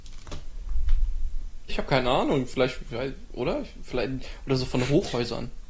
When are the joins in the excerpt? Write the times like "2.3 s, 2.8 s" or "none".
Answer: 1.7 s